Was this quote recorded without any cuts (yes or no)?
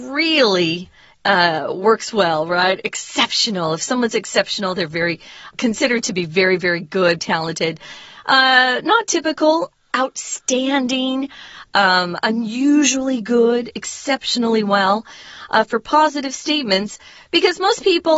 no